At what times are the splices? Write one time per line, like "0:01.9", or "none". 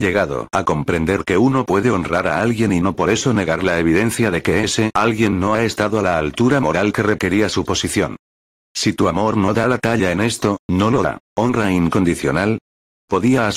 0:08.5
0:11.3